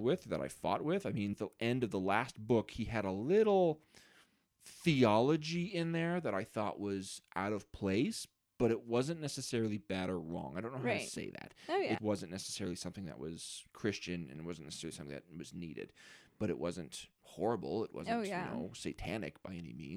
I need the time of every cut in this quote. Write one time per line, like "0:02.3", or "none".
0:01.3
0:12.0